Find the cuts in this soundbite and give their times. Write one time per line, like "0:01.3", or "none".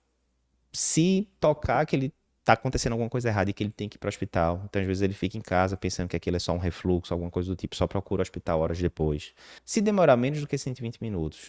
0:09.6